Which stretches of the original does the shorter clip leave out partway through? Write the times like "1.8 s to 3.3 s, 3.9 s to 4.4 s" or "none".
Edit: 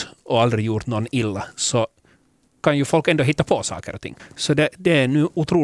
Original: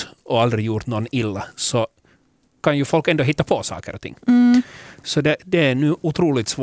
4.2 s to 4.9 s